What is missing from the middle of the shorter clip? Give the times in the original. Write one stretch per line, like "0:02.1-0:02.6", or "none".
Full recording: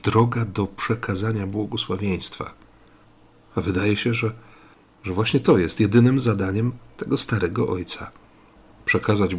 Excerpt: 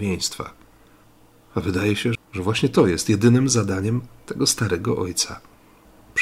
0:04.2-0:04.9